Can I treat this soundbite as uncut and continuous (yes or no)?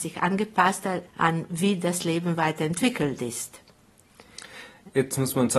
no